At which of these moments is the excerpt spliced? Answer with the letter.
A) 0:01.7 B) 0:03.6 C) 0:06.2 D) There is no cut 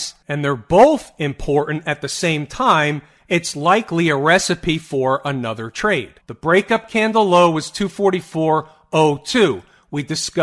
C